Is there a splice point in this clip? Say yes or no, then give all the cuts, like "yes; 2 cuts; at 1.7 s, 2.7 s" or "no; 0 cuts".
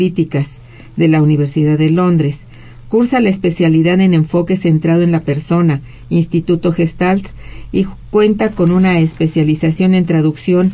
no; 0 cuts